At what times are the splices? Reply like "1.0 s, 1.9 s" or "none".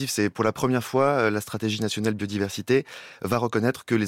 none